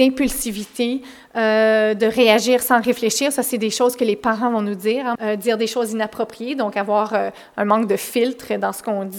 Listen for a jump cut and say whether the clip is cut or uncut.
cut